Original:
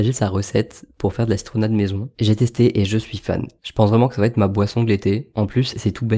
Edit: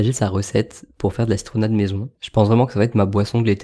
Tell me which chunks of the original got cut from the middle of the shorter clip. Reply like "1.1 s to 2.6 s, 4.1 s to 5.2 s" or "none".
2.1 s to 3.6 s